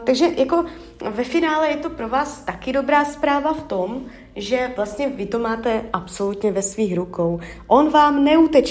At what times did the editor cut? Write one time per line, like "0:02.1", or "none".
none